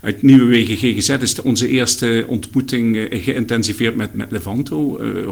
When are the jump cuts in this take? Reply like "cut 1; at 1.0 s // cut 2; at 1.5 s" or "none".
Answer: cut 1; at 4.1 s